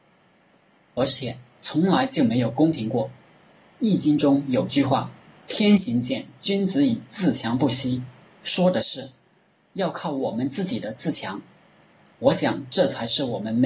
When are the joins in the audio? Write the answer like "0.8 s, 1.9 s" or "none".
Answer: none